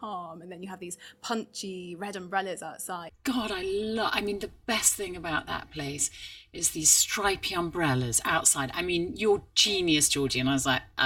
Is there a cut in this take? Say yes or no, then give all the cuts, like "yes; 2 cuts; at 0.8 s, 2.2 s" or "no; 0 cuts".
yes; 1 cut; at 3.1 s